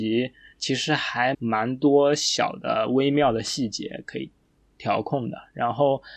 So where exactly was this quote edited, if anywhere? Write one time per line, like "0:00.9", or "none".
0:01.3